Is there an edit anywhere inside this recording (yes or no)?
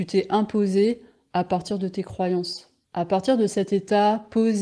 yes